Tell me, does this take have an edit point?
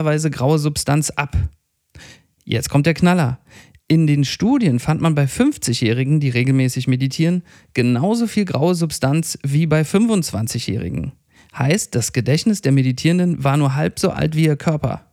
no; 0 cuts

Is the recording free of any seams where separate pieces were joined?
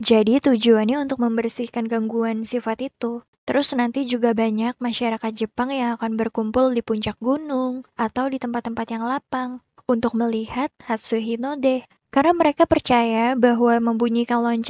no; 2 cuts; at 7.9 s, 12.0 s

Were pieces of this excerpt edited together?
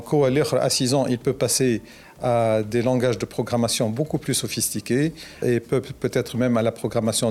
yes; 1 cut; at 5.4 s

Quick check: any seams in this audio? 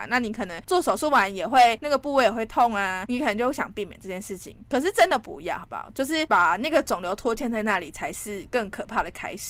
no; 0 cuts

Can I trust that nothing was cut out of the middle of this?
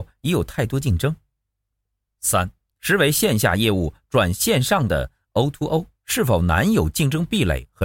no; 2 cuts; at 2.8 s, 5.9 s

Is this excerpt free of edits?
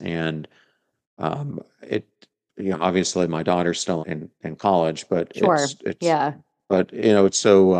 no; 1 cut; at 4.0 s

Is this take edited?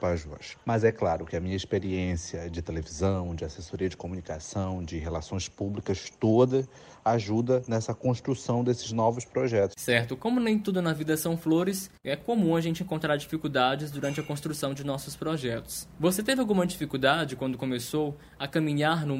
no; 0 cuts

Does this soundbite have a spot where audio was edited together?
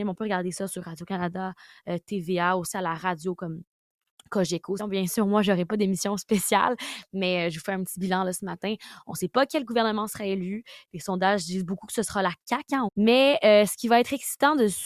yes; 2 cuts; at 4.8 s, 12.9 s

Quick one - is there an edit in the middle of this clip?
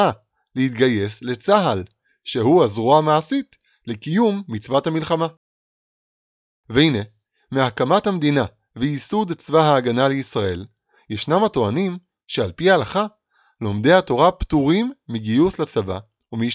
no; 0 cuts

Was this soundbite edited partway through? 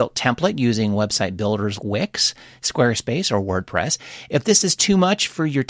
yes; 1 cut; at 1.8 s

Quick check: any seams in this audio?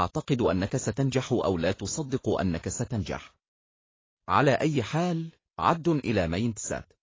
no; 0 cuts

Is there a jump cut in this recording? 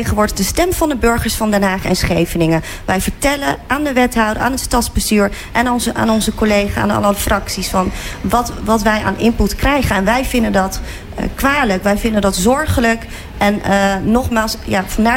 no; 0 cuts

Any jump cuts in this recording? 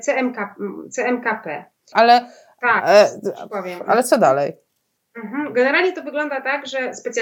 yes; 1 cut; at 1.9 s

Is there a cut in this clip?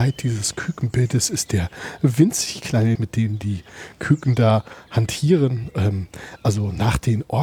yes; 1 cut; at 3.0 s

